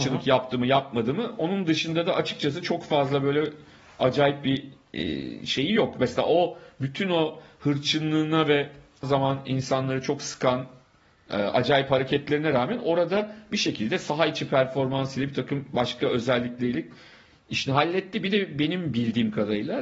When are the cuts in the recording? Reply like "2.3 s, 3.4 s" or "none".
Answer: 9.0 s